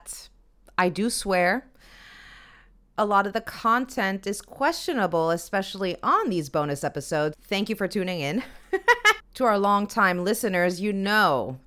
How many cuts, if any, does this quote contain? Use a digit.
2